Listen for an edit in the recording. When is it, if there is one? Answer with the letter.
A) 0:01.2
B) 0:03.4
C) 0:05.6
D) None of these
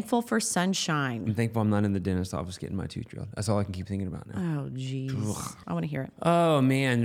C